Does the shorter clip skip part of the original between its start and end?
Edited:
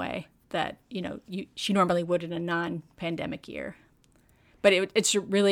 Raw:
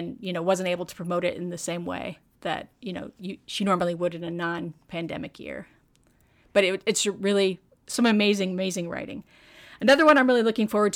no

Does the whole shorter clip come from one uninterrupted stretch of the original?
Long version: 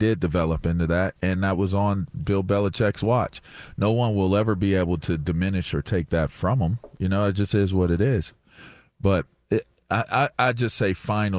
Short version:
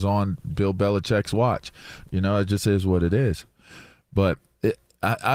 no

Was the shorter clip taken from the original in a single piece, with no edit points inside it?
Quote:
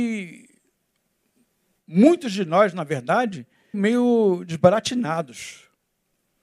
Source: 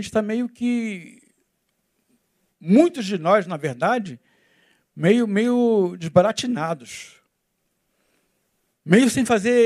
no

